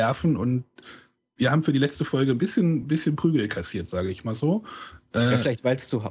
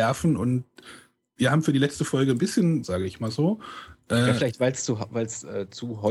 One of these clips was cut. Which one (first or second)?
second